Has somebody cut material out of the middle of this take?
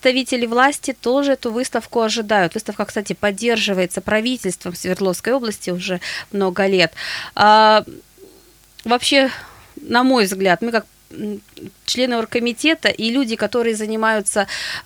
no; 0 cuts

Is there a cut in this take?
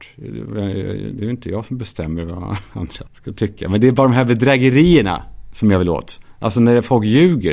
yes; 1 cut; at 3.1 s

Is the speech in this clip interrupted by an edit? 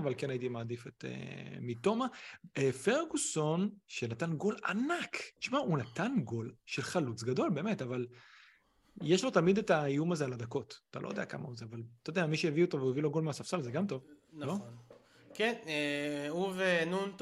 no; 0 cuts

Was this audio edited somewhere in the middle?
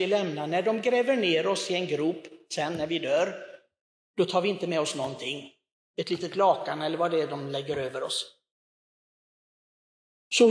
no; 0 cuts

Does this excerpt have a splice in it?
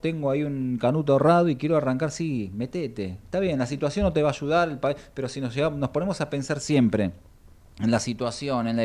no; 0 cuts

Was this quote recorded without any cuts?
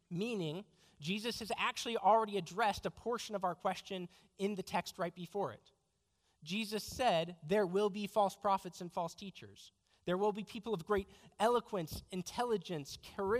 yes; 0 cuts

